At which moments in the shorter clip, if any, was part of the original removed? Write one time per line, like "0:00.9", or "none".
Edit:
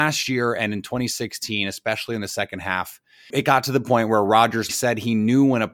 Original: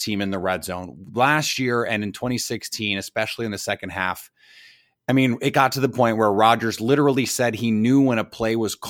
0:03.3
0:04.7